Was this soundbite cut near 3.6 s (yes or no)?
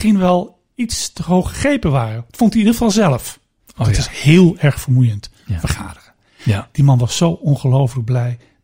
yes